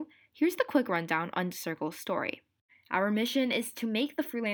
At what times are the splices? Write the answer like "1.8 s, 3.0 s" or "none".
2.7 s